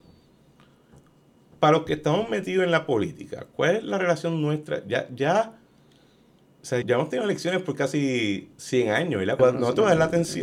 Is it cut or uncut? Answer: cut